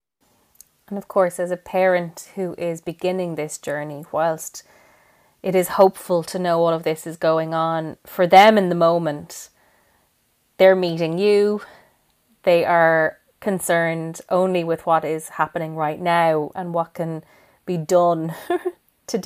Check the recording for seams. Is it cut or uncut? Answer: uncut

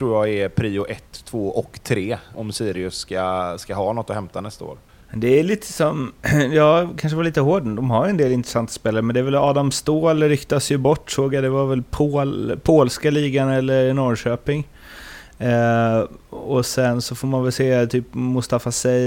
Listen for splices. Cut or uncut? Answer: cut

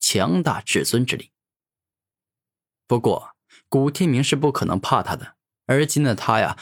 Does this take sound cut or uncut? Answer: uncut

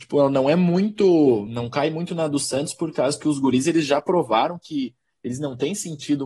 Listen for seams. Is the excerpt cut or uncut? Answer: uncut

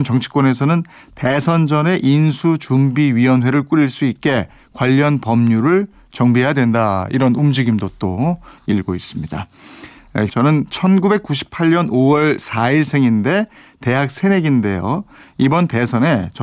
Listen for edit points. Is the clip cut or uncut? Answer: cut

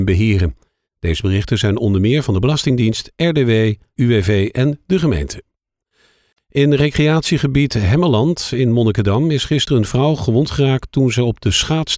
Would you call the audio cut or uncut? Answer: cut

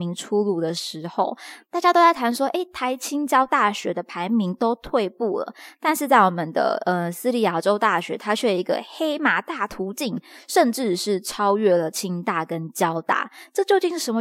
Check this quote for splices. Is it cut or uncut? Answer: uncut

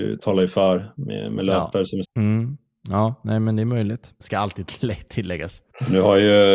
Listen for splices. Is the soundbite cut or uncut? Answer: cut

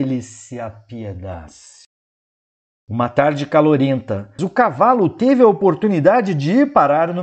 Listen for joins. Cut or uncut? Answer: cut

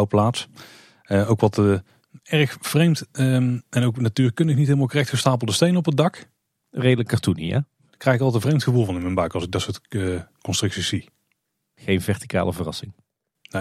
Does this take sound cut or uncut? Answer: uncut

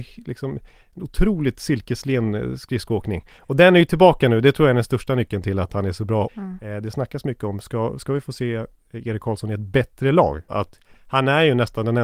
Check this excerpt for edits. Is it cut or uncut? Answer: cut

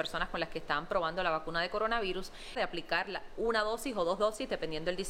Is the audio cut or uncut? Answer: cut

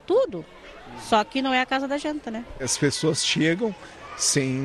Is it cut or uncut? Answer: uncut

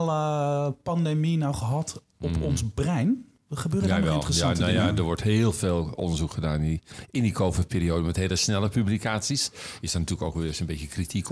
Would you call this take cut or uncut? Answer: uncut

